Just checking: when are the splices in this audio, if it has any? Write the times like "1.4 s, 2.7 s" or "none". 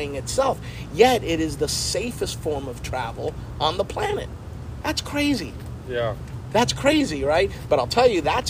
4.8 s